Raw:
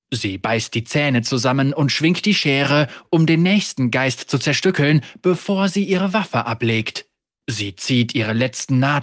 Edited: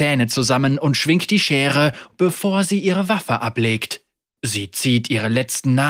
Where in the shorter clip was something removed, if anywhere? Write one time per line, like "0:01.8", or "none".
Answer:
0:02.1